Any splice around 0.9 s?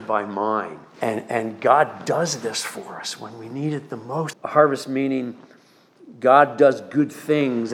yes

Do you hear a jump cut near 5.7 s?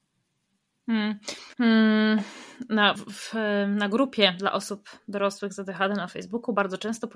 no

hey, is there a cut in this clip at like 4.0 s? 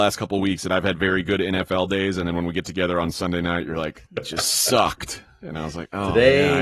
yes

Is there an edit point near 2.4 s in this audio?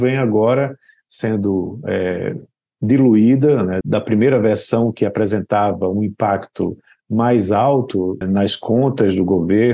no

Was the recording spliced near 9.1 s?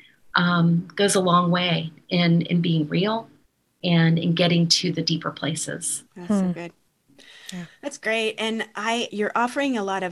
yes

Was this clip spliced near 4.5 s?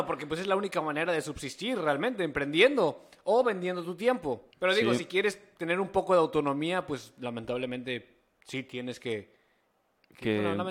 yes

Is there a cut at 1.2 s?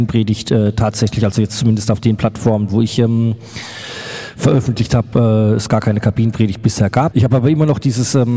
no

